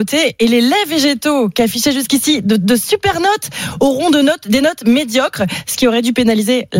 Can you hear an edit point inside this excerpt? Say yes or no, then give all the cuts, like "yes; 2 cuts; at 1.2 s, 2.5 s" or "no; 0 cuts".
no; 0 cuts